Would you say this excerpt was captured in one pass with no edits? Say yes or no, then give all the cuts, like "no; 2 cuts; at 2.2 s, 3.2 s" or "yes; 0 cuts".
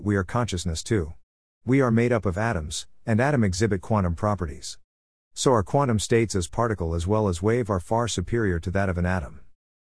no; 1 cut; at 5.1 s